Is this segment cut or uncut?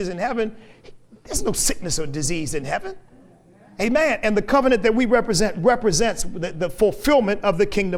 uncut